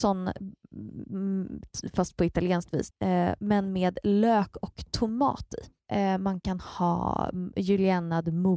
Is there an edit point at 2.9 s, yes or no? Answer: yes